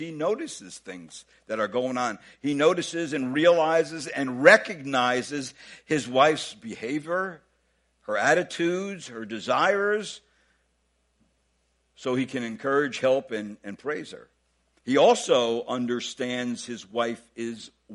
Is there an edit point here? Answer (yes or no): no